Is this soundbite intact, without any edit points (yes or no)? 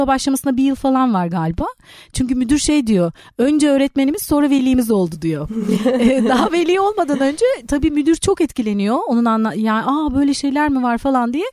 yes